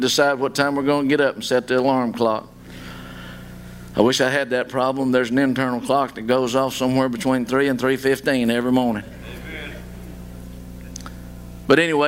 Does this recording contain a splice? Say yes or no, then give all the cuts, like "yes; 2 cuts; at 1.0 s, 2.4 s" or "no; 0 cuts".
no; 0 cuts